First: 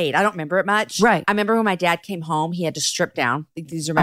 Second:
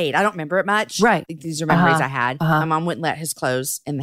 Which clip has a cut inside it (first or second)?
second